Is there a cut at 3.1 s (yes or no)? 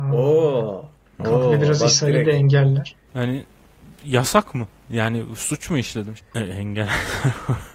yes